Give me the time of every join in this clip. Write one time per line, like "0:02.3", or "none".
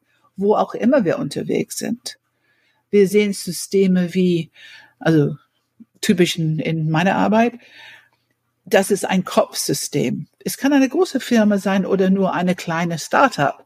none